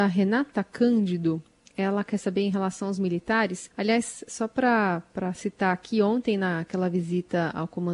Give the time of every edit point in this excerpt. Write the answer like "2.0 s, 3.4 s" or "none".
3.7 s